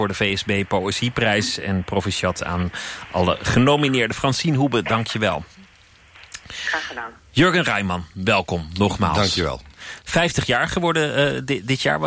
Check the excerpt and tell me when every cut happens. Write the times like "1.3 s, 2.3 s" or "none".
none